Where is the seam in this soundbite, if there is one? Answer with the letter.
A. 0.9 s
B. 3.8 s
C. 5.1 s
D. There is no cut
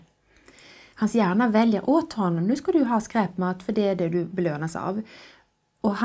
A